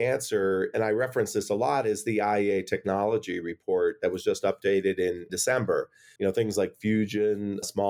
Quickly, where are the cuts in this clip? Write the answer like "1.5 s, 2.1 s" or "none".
6.2 s